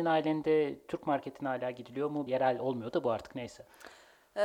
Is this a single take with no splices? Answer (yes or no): no